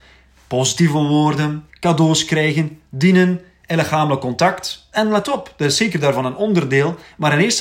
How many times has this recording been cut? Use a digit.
2